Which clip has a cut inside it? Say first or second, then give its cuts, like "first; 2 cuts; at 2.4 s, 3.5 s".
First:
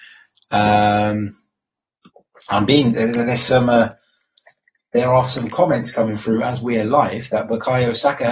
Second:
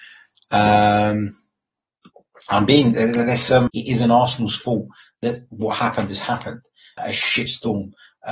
second; 2 cuts; at 3.7 s, 7.0 s